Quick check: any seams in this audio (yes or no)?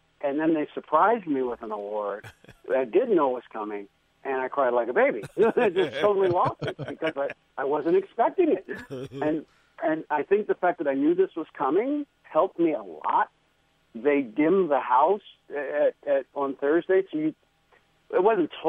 no